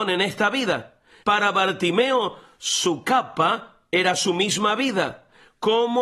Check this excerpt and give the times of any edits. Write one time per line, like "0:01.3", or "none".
0:01.2